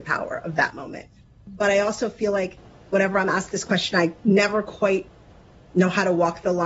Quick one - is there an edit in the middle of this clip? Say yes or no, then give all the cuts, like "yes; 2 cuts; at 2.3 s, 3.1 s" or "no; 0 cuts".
no; 0 cuts